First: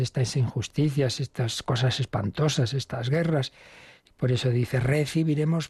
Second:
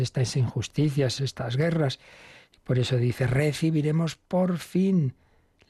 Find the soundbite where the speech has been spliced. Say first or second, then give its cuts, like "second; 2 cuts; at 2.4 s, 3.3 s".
second; 1 cut; at 1.2 s